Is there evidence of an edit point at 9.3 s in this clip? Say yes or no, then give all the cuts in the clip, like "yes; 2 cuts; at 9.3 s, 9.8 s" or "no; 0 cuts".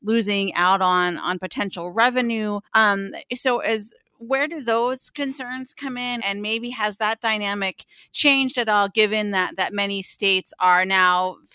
no; 2 cuts; at 2.7 s, 6.2 s